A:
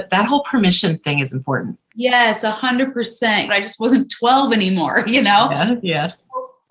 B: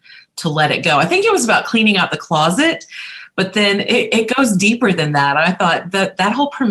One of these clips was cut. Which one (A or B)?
A